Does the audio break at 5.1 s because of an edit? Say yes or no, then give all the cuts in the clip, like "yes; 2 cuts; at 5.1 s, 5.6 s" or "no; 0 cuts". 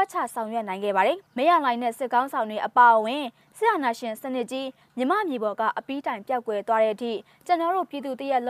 no; 1 cut; at 1.3 s